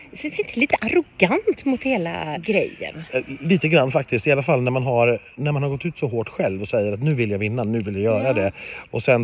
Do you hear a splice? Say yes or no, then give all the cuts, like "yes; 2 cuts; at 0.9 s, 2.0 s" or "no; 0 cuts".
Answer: yes; 1 cut; at 2.3 s